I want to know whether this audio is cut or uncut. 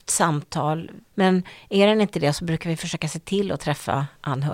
cut